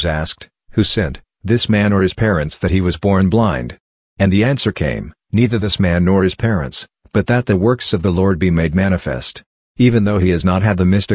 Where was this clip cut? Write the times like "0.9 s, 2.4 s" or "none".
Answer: 9.7 s